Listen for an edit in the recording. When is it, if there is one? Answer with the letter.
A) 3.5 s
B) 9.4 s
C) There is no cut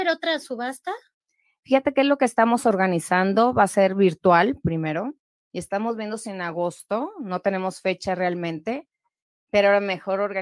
B